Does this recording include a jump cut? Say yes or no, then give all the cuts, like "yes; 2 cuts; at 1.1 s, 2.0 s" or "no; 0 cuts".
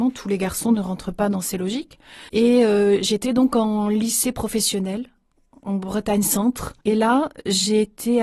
yes; 2 cuts; at 2.3 s, 6.8 s